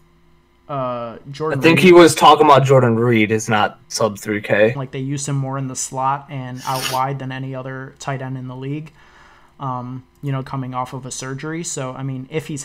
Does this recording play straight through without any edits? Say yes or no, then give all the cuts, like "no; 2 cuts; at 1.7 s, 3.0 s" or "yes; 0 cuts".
no; 2 cuts; at 4.8 s, 10.4 s